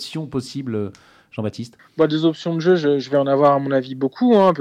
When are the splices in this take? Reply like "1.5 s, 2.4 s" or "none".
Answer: none